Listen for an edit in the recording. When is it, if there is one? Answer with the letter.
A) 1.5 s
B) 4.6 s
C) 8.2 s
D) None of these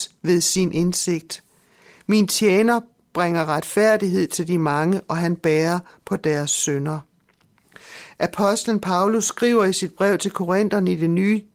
D